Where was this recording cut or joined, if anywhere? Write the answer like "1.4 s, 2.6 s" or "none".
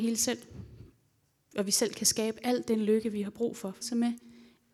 3.8 s